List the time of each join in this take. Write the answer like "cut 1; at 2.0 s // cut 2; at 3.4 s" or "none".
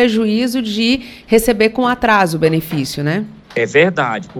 cut 1; at 3.4 s